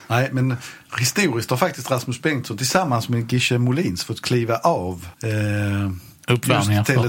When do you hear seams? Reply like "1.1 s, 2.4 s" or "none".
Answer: 5.1 s